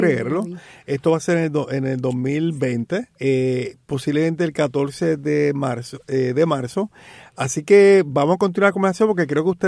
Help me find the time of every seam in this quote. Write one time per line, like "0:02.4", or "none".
0:03.1